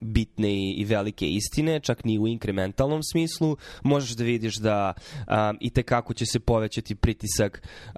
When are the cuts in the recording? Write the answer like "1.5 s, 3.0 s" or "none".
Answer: none